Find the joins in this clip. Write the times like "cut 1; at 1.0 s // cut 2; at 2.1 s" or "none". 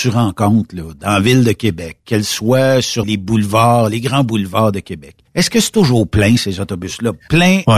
cut 1; at 3.0 s // cut 2; at 5.3 s